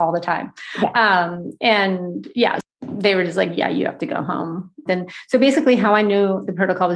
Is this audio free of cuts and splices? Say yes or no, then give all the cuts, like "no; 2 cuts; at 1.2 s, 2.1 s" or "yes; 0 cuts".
no; 2 cuts; at 2.6 s, 4.9 s